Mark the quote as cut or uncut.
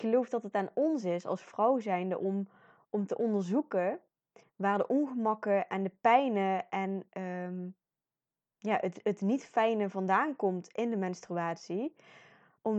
uncut